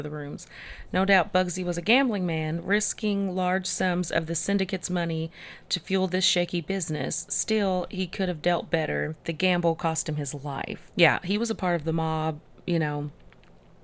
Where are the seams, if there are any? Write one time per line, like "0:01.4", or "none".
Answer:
0:09.2
0:10.9